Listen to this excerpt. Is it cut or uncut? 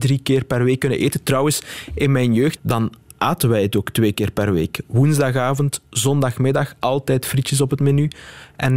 cut